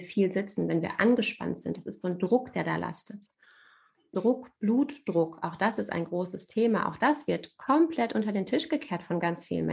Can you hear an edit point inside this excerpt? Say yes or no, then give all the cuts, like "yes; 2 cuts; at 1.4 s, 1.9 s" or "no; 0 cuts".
yes; 1 cut; at 4.1 s